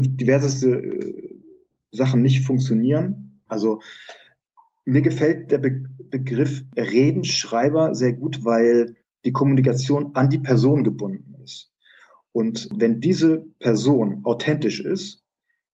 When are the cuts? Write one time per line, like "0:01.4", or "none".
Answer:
0:03.5